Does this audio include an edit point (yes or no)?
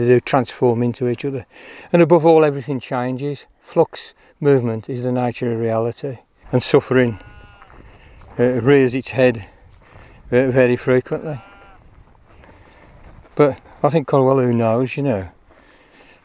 yes